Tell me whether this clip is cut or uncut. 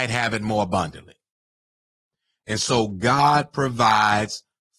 uncut